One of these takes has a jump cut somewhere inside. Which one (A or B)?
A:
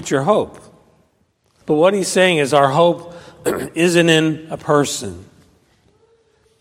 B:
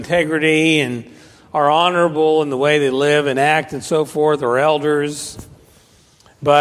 A